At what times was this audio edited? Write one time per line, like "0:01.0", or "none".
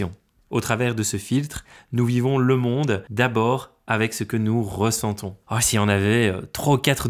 0:05.4